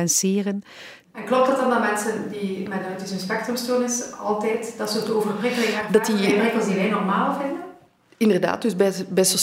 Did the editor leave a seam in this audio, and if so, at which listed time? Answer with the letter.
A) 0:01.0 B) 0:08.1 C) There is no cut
A